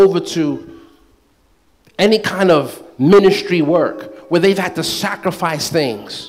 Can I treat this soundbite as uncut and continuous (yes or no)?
yes